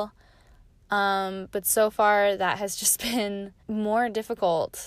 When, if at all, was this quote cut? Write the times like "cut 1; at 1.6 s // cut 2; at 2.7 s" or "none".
cut 1; at 3.6 s